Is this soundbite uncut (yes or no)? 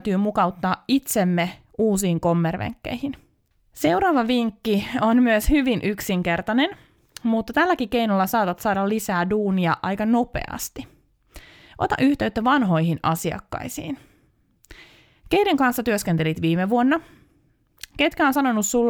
yes